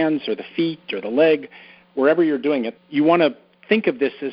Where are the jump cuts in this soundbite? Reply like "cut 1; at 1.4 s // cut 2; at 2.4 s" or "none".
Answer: cut 1; at 2.7 s